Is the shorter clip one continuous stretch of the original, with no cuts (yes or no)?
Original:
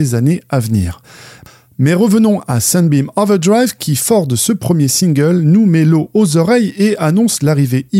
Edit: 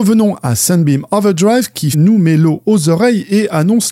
no